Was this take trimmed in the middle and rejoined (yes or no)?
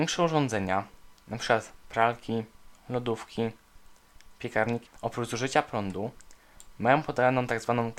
yes